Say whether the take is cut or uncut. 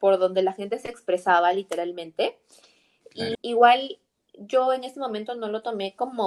cut